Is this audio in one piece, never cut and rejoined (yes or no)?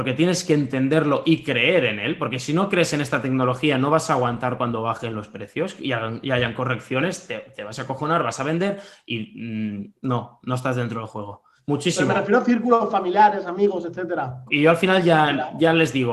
no